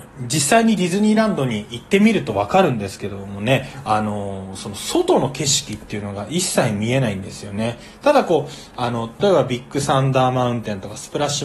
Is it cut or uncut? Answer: cut